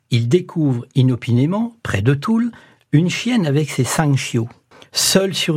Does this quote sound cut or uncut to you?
uncut